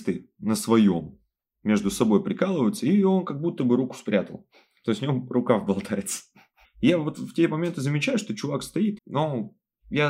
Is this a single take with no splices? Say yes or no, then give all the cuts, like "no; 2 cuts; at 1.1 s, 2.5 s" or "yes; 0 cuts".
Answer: no; 2 cuts; at 6.6 s, 9.0 s